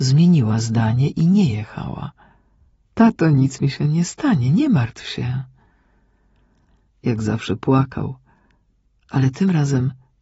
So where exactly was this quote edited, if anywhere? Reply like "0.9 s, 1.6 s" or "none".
2.8 s, 6.9 s